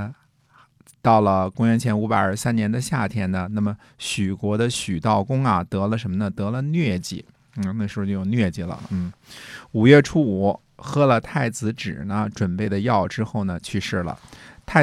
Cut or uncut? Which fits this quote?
uncut